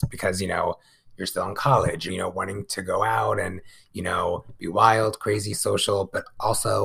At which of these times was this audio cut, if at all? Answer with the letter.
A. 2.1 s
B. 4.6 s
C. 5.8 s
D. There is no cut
A